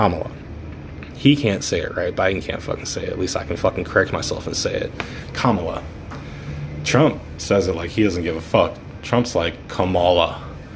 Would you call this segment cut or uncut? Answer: uncut